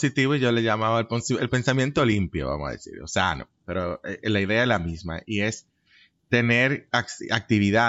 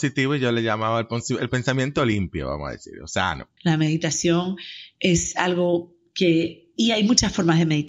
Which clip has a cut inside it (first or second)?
second